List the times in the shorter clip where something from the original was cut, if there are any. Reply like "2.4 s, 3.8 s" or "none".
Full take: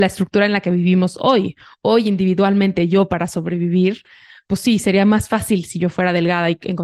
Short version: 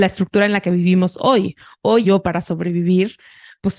2.0 s